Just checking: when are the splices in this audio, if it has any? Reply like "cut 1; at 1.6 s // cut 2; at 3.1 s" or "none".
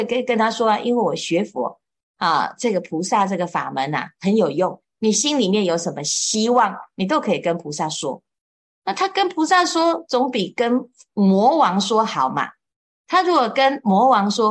none